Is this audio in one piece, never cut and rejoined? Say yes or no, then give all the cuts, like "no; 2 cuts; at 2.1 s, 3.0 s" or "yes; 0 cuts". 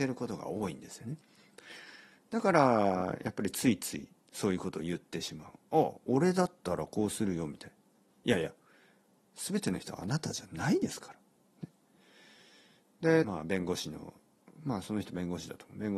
no; 1 cut; at 13.2 s